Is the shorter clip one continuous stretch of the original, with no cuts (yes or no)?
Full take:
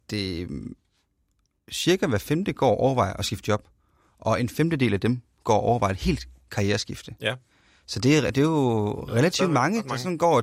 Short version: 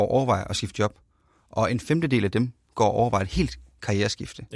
yes